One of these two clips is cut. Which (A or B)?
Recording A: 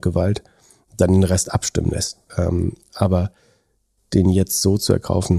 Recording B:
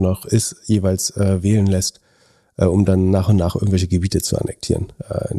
A